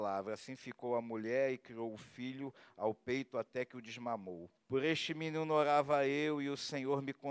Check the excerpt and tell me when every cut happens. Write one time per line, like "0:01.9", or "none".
0:04.6

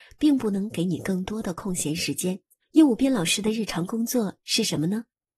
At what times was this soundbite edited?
0:02.6

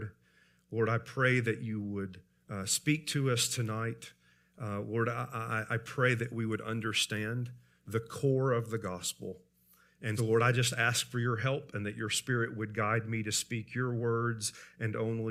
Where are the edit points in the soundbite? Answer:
0:10.2

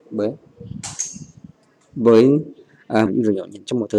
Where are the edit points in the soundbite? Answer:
0:03.1

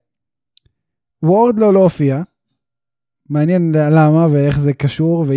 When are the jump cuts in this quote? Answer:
none

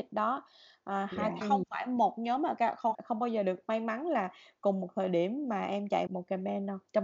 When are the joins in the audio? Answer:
0:01.4
0:02.9
0:06.1

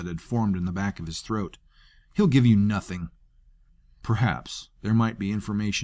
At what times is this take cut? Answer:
0:04.8

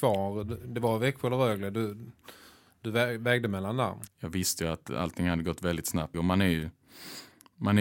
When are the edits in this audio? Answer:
0:04.1
0:06.1

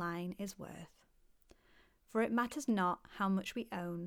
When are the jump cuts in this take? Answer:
none

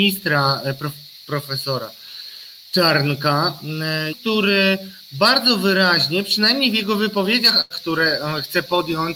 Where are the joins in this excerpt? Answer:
0:04.1
0:07.7

